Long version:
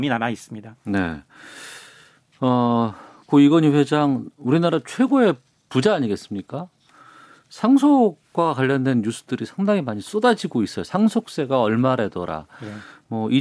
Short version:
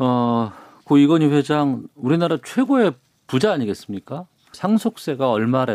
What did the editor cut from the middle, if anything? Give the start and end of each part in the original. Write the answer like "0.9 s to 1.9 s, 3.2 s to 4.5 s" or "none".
7.0 s to 10.8 s